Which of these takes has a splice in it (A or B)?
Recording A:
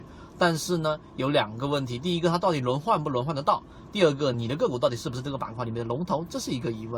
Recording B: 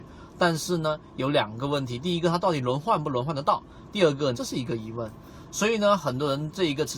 B